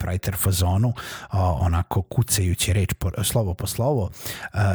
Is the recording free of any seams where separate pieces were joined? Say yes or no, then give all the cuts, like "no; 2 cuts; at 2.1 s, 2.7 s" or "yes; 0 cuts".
yes; 0 cuts